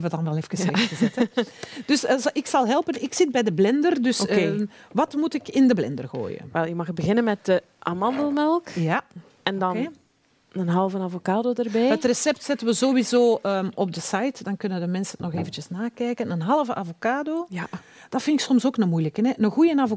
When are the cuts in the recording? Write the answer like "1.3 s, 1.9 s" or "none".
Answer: none